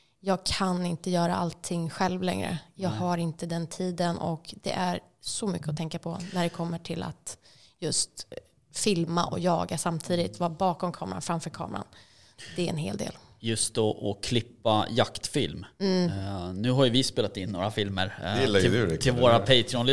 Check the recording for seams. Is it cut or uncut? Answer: uncut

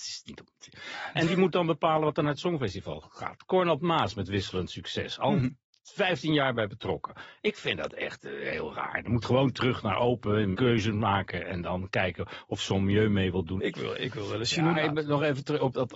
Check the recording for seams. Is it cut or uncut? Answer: cut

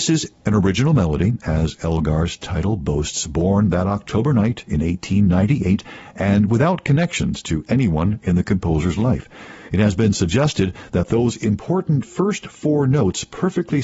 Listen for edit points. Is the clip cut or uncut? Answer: uncut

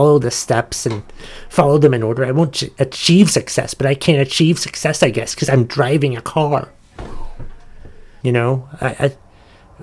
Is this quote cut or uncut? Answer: cut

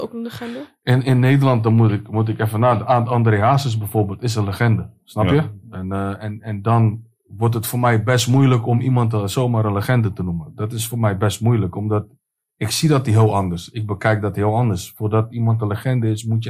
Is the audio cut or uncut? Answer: uncut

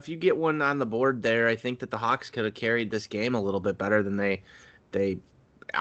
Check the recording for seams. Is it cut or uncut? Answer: uncut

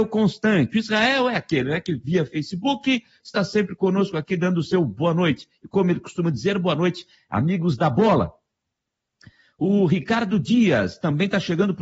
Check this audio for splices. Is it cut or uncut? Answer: cut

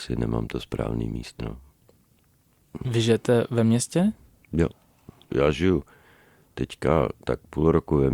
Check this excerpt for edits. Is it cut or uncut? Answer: cut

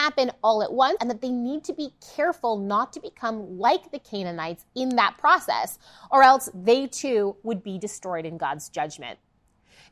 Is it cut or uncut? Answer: cut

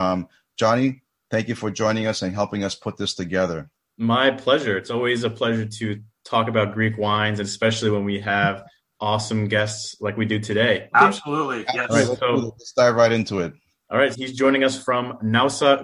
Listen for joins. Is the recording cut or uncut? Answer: cut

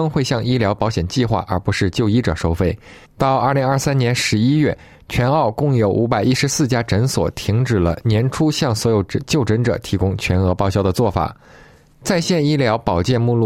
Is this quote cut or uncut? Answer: cut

